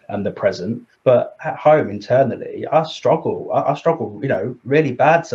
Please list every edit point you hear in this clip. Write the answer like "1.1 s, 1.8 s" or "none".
0.9 s